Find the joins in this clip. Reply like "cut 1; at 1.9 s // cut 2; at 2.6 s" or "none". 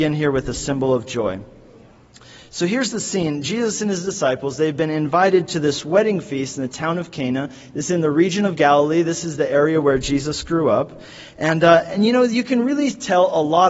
none